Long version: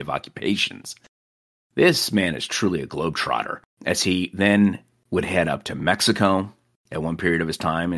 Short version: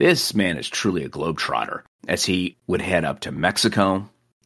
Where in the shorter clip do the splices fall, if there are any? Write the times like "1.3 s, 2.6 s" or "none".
2.5 s